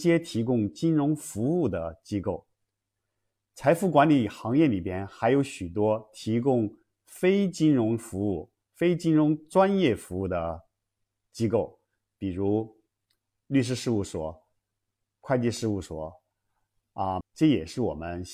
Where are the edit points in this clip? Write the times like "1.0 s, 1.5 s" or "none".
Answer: 17.2 s